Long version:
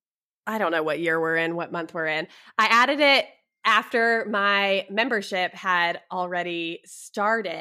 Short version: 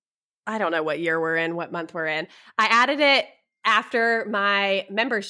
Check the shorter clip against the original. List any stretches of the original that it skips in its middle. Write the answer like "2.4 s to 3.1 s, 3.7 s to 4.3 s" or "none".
none